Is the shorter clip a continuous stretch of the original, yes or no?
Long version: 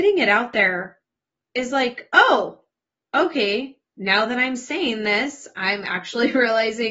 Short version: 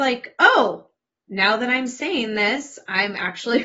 no